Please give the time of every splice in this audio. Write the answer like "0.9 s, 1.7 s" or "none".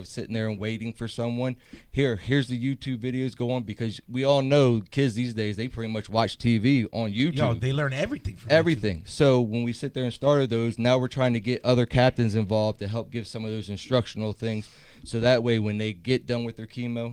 none